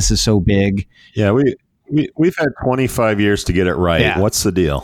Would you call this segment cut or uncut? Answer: uncut